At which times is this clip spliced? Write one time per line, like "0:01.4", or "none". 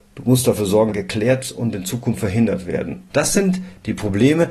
0:00.9
0:03.1